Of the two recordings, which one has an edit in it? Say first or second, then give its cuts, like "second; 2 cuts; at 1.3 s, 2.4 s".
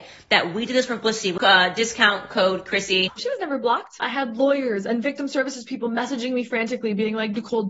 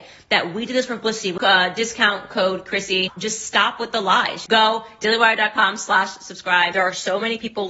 first; 1 cut; at 3.2 s